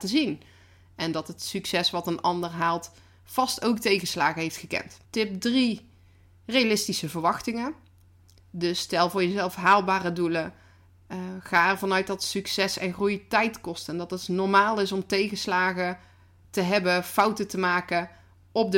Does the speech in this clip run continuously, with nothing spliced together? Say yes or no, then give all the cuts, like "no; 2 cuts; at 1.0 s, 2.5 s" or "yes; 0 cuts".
no; 1 cut; at 5.0 s